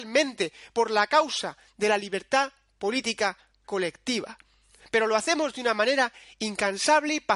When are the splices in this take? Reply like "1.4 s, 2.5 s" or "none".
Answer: none